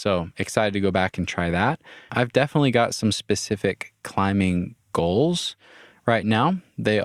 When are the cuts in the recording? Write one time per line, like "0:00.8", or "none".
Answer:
0:02.1